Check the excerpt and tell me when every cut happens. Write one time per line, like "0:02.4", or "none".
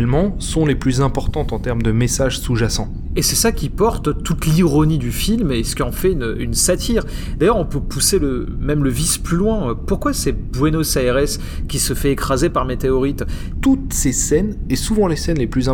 0:13.5